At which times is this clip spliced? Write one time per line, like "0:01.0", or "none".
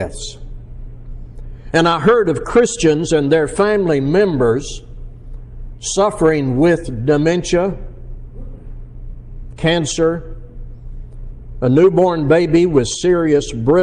0:01.7
0:09.5

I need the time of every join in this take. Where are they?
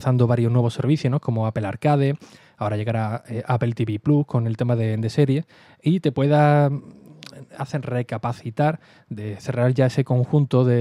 none

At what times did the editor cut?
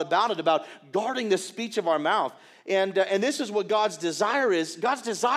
none

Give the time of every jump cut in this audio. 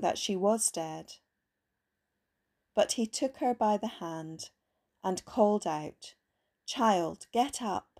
none

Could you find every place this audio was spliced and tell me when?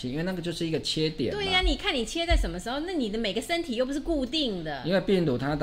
none

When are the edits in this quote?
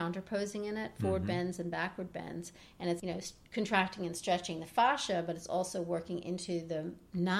0:03.0

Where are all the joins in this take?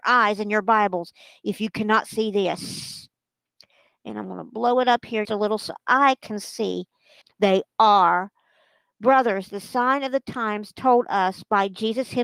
0:05.3
0:07.2

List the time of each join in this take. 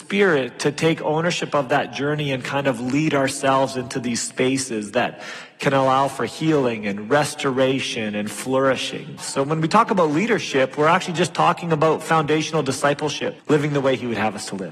0:09.2
0:13.4

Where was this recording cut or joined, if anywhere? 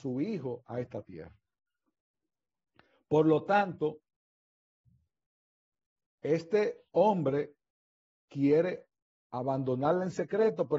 0:06.9

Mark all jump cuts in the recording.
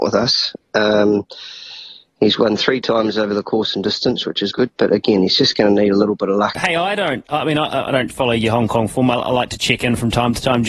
0:04.5
0:06.5

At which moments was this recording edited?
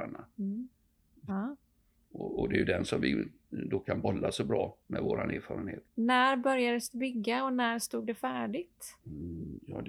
0:01.3
0:04.8
0:05.8

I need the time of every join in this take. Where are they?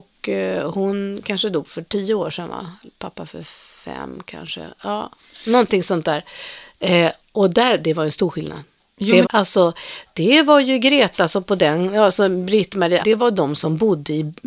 0:09.2
0:13.0

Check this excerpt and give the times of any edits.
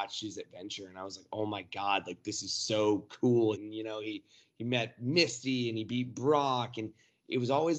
0:03.5

